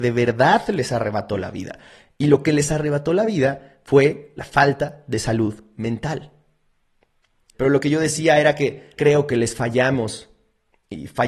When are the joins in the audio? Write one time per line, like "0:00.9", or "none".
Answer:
0:07.5
0:09.0